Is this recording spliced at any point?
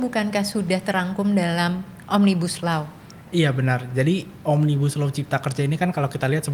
no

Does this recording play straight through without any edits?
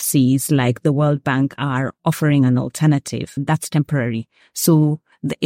no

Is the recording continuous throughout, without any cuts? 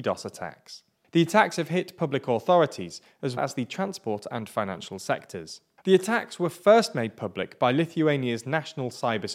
no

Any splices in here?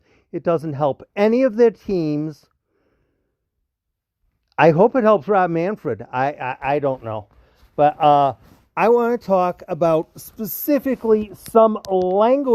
no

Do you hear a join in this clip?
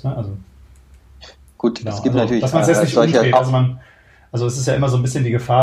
no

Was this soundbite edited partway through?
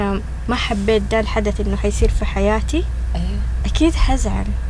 no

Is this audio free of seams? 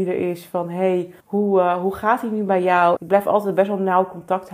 no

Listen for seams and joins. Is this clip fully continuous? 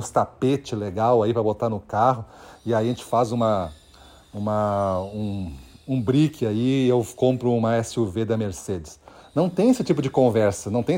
yes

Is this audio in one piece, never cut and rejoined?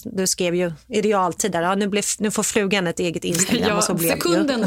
yes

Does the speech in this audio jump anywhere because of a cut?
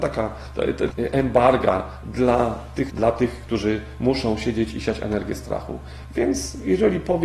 yes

